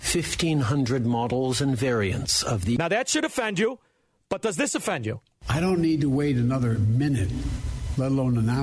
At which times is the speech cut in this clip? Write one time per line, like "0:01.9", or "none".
none